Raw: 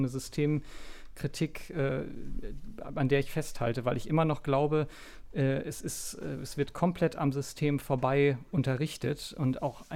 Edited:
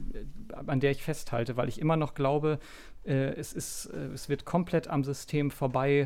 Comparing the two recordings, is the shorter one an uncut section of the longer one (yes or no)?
yes